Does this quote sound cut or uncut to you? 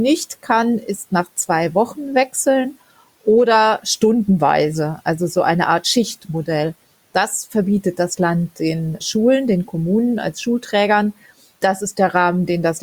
uncut